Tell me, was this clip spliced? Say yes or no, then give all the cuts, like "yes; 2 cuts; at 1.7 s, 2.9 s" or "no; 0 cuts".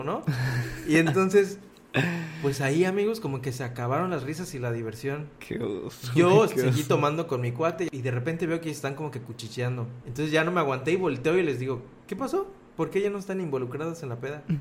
no; 0 cuts